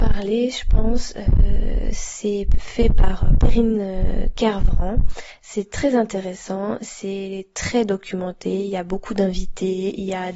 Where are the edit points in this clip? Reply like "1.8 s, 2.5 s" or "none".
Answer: none

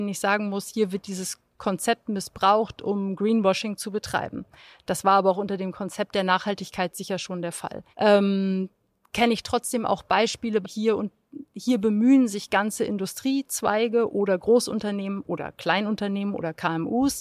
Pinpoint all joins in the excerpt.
7.9 s, 10.6 s

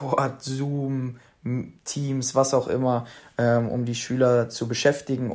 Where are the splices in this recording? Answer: none

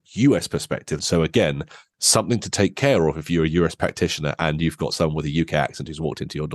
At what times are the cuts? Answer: 1.0 s

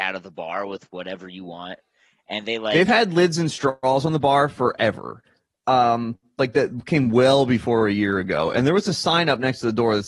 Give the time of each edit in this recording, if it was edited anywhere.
none

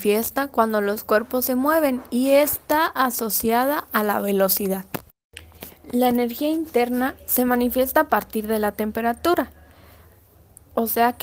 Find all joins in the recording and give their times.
none

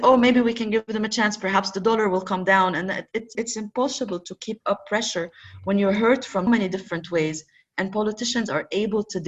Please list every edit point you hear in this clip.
3.3 s, 6.5 s

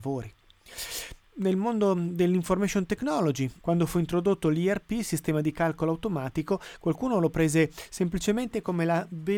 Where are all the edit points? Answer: 3.6 s

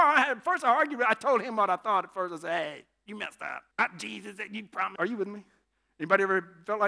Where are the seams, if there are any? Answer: 3.7 s, 5.0 s

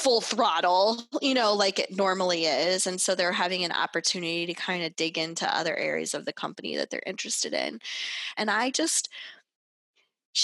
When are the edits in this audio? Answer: 8.3 s

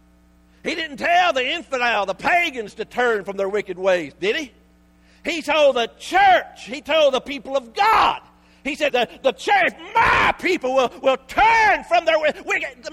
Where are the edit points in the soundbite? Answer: 8.9 s

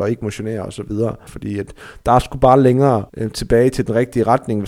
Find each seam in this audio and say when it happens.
1.3 s, 3.1 s

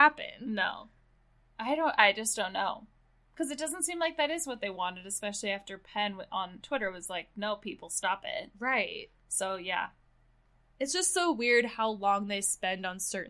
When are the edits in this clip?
none

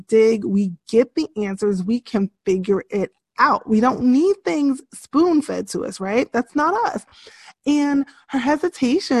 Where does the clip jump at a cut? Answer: none

